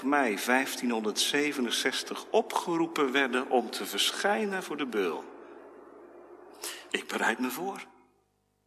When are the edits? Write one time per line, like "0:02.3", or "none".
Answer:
0:06.9